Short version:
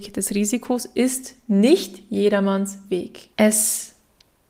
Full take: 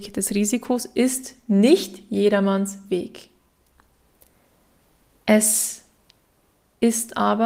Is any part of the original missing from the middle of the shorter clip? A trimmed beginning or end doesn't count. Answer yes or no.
yes